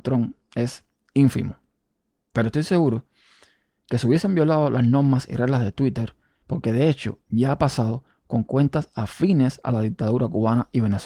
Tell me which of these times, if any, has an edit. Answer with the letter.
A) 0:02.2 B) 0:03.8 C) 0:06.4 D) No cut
C